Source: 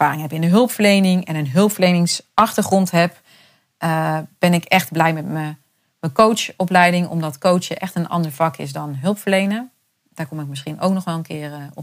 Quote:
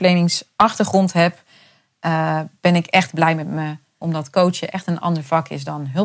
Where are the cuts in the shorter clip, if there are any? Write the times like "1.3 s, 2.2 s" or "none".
4.0 s